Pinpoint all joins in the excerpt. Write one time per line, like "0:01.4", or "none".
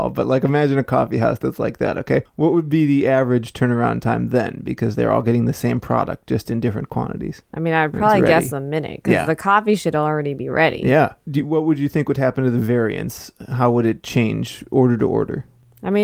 none